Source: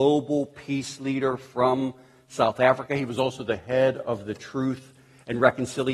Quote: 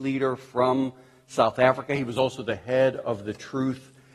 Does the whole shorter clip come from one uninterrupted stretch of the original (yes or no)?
yes